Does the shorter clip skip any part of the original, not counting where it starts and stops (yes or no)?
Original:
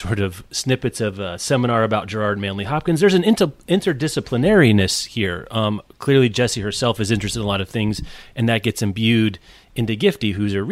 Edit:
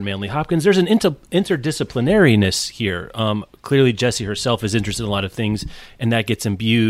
no